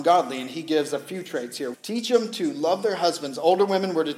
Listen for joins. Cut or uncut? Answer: cut